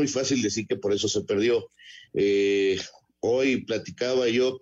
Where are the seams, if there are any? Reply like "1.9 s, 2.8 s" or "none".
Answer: none